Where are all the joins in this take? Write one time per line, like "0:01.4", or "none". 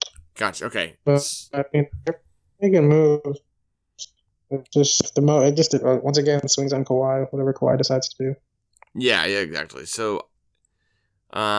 none